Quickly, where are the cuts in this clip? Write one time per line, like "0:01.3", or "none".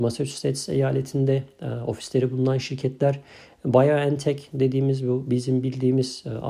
none